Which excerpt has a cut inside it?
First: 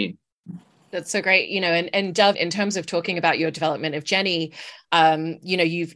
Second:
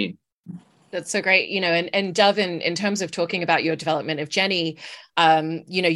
first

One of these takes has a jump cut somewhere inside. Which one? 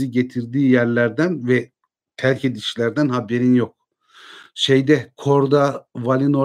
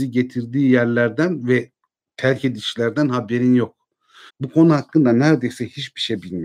second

